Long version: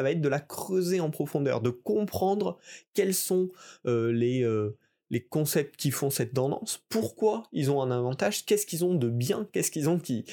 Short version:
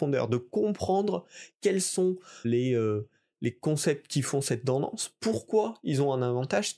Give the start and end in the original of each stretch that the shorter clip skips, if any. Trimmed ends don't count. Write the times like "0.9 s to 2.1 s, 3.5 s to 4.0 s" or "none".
3.8 s to 4.1 s